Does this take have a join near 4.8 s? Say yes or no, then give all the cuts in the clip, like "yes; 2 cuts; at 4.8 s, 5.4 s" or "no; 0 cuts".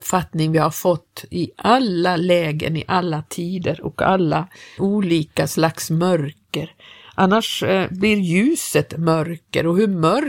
yes; 1 cut; at 4.8 s